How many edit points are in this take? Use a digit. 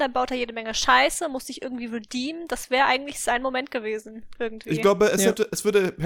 0